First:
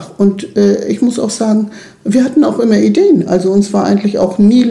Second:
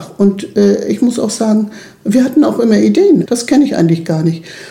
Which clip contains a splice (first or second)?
second